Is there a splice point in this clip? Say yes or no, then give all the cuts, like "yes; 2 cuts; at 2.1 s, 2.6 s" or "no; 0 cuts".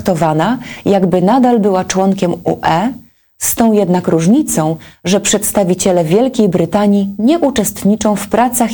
no; 0 cuts